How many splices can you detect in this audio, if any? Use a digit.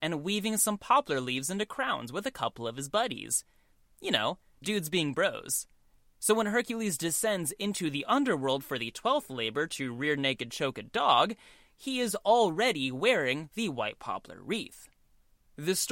1